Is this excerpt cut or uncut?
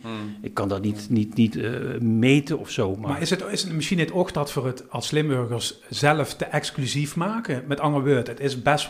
cut